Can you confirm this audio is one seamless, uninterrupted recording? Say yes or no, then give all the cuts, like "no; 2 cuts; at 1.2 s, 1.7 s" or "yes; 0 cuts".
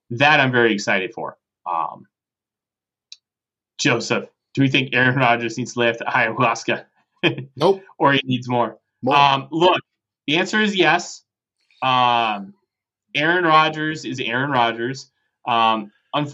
yes; 0 cuts